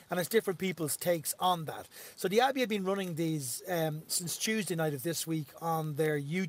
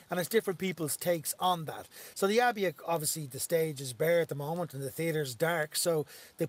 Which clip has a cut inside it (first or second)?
second